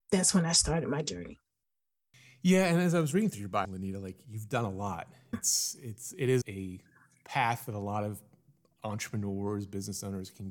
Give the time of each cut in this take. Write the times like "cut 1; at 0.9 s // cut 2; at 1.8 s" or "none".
cut 1; at 3.6 s // cut 2; at 5.3 s // cut 3; at 6.4 s